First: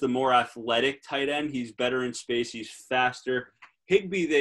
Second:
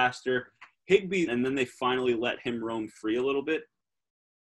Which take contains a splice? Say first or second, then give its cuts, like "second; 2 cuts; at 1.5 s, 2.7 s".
second; 1 cut; at 1.3 s